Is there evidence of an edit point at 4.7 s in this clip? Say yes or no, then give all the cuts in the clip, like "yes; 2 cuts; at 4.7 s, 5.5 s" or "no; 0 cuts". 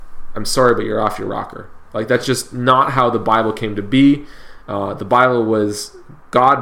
no; 0 cuts